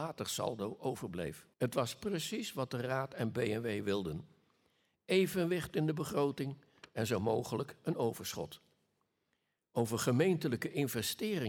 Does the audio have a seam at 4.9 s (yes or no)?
no